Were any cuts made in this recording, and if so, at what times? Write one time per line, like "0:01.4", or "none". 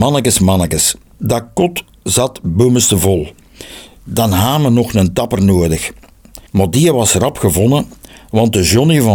0:04.0
0:06.5